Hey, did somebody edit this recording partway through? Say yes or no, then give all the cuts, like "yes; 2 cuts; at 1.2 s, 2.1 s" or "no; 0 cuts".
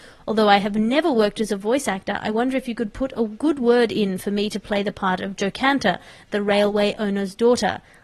no; 0 cuts